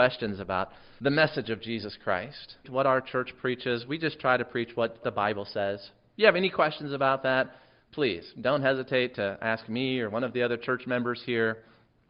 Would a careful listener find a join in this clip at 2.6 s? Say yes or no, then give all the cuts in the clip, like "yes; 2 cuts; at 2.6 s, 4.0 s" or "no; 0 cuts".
yes; 1 cut; at 2.6 s